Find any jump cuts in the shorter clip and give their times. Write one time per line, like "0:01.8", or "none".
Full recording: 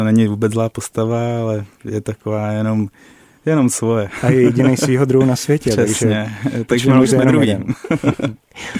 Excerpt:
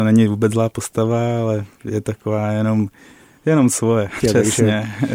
0:04.2